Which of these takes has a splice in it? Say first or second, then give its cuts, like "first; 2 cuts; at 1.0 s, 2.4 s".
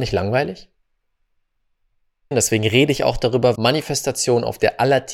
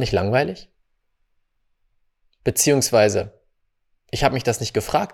first; 2 cuts; at 2.3 s, 3.5 s